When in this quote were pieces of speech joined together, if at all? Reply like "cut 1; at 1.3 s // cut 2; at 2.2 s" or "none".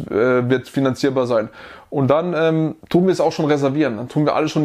none